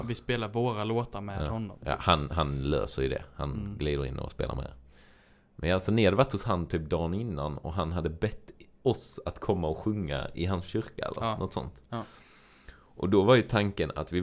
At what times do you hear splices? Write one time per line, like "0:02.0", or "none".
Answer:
none